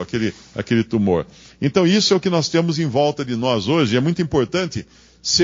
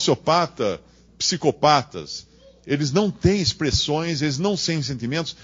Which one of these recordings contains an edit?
second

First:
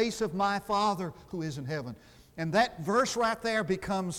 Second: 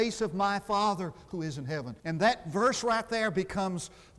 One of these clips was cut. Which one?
second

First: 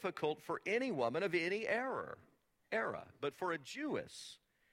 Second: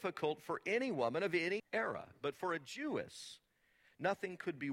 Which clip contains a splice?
second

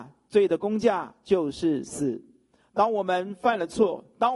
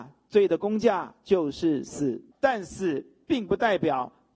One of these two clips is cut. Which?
second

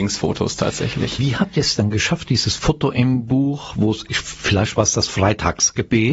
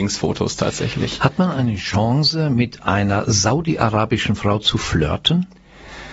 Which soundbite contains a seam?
first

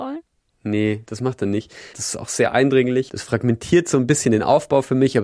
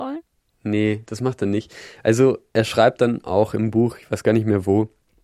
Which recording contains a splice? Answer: first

